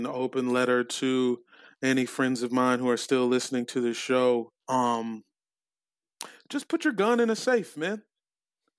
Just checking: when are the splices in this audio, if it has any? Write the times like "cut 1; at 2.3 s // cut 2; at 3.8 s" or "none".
cut 1; at 4.6 s